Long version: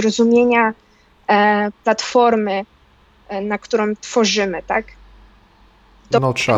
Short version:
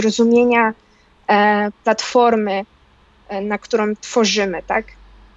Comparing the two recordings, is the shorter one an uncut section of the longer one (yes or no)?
yes